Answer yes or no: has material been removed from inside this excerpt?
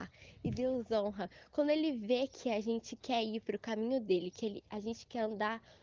no